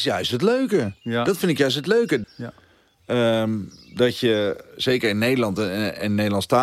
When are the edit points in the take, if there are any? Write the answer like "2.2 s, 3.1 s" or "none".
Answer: 2.2 s